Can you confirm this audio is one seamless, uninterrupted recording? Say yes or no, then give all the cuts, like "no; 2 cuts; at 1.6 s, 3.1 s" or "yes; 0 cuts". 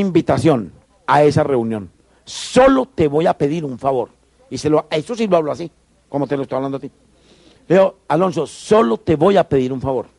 yes; 0 cuts